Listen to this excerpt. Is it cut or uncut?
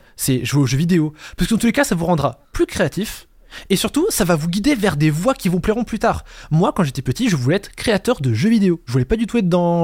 uncut